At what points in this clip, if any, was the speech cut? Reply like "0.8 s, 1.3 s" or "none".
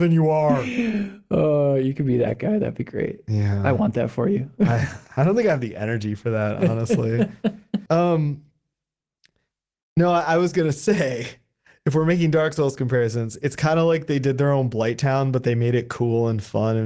7.9 s